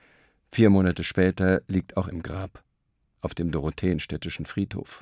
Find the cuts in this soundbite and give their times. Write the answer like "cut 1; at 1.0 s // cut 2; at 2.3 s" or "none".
cut 1; at 2.1 s

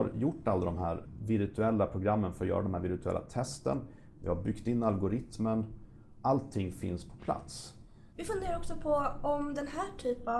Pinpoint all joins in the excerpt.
cut 1; at 8.1 s

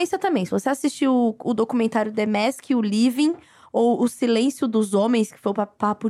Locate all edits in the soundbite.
none

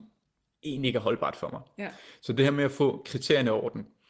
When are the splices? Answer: none

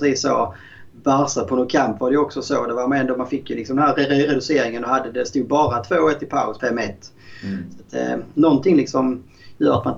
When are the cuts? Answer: cut 1; at 6.6 s

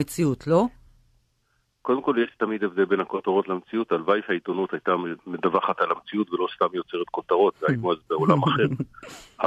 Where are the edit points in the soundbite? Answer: none

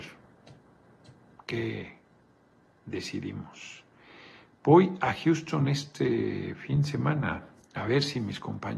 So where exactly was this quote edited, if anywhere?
cut 1; at 7.5 s

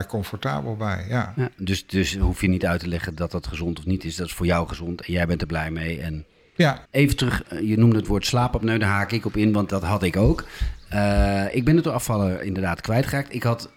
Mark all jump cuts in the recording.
cut 1; at 6.9 s

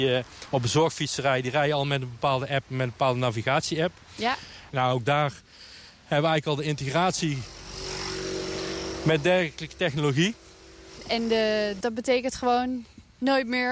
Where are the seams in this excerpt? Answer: cut 1; at 4.7 s // cut 2; at 11.8 s

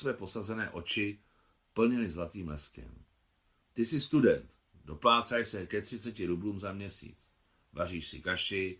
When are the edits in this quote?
none

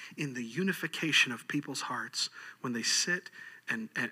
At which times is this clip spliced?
none

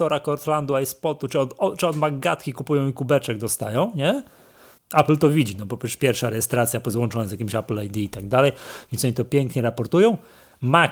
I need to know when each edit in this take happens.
cut 1; at 4.8 s

